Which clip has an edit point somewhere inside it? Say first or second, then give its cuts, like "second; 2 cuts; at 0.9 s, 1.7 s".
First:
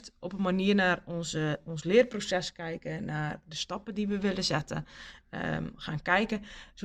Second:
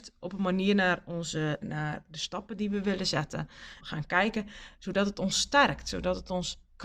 second; 2 cuts; at 1.6 s, 3.8 s